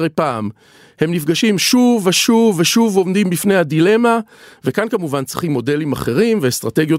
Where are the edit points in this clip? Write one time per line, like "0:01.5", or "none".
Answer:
none

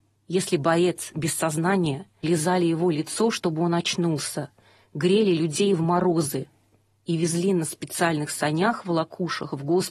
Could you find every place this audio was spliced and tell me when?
0:02.2

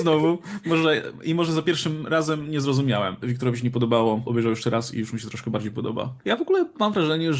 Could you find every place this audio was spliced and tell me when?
0:03.2
0:04.2
0:06.2

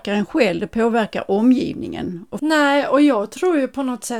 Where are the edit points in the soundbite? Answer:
0:02.4

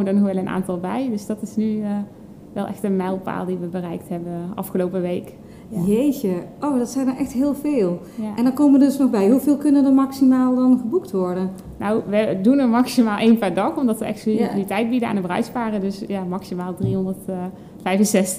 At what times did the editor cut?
none

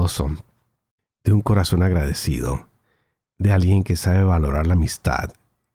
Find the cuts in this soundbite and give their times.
none

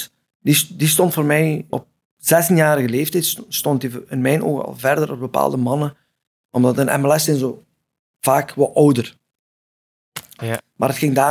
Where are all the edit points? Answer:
0:01.7
0:10.4

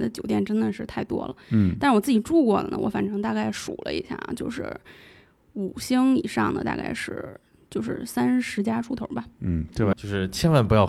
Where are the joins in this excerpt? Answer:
0:09.9

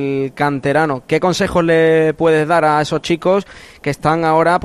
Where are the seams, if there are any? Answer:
none

